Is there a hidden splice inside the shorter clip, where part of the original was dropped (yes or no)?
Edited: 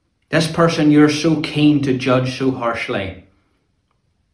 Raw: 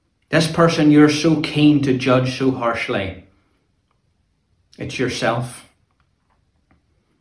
no